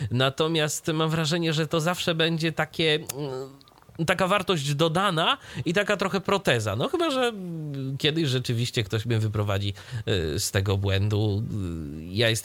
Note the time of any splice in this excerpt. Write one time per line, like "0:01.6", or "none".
none